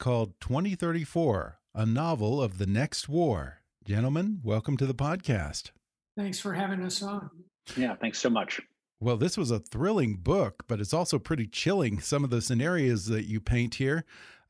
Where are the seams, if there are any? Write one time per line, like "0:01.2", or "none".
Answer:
none